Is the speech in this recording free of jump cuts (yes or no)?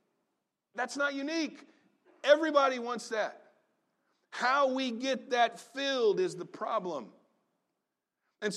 yes